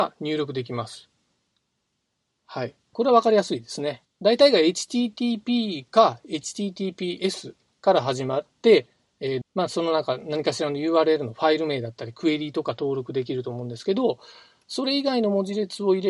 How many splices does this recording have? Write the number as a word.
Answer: three